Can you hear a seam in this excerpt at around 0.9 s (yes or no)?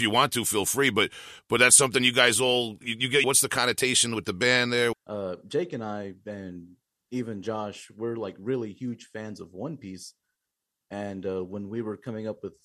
no